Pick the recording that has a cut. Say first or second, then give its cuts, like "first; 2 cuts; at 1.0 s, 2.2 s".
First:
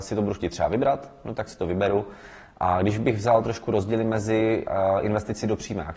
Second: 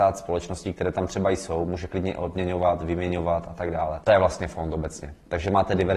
second; 1 cut; at 4.0 s